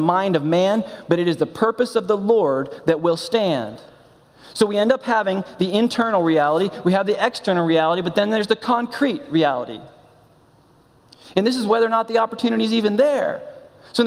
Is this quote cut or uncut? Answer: uncut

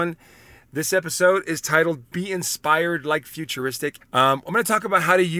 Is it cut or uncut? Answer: cut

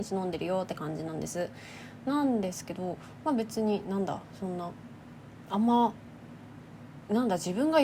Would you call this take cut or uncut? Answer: uncut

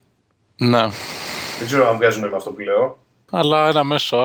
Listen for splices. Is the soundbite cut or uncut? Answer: cut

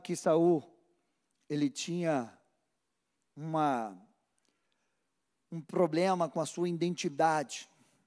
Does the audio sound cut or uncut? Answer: uncut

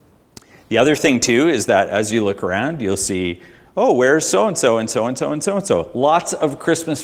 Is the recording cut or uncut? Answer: uncut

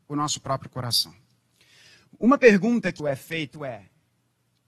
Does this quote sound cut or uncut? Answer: cut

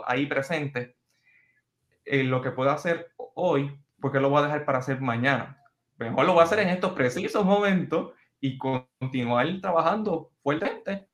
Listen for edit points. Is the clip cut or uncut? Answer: uncut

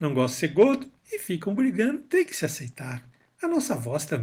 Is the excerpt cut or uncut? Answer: cut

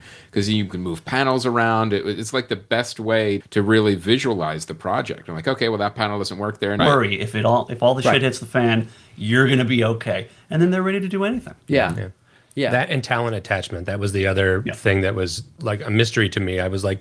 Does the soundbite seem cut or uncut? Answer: cut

